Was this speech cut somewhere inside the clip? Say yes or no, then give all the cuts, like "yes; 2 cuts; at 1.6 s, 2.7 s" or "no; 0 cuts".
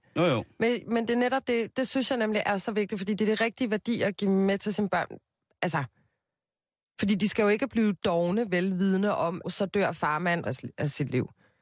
yes; 2 cuts; at 9.4 s, 10.4 s